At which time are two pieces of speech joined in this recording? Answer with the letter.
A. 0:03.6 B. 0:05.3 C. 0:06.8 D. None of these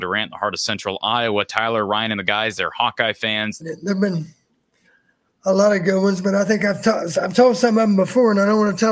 A